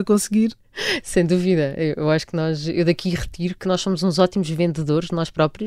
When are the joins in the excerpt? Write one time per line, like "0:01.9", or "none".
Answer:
none